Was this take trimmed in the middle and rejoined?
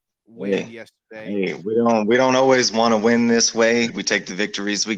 yes; 1 cut; at 3.9 s

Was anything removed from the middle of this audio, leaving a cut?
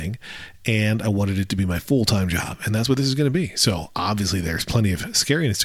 no; 0 cuts

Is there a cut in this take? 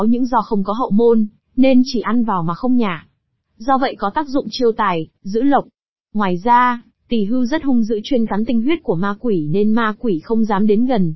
no; 0 cuts

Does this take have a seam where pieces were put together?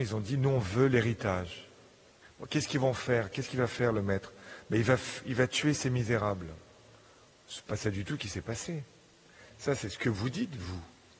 yes; 1 cut; at 2.2 s

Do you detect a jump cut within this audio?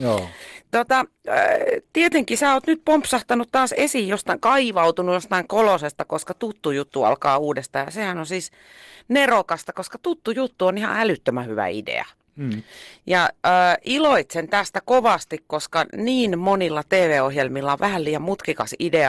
no; 0 cuts

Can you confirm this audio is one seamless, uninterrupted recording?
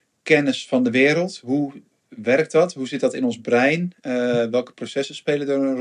yes; 0 cuts

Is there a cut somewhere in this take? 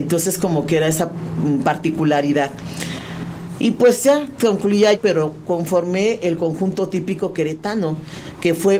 yes; 1 cut; at 4.9 s

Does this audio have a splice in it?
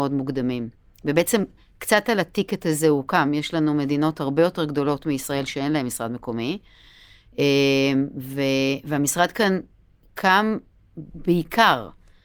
no; 0 cuts

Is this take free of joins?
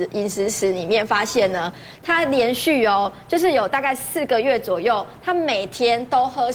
yes; 0 cuts

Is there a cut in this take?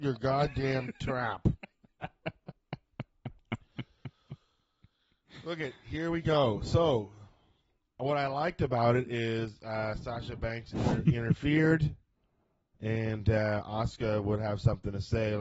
no; 0 cuts

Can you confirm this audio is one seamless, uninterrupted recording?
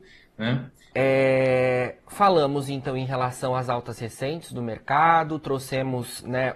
no; 1 cut; at 0.9 s

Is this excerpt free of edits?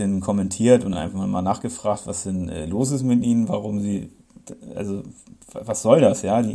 yes; 0 cuts

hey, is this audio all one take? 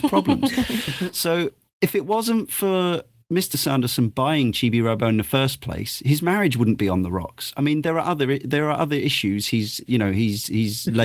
yes; 0 cuts

